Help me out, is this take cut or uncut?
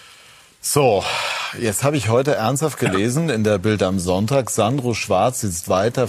uncut